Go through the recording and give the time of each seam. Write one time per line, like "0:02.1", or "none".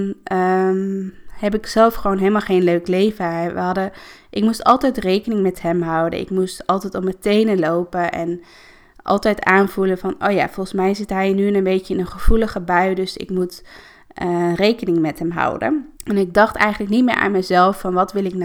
0:16.0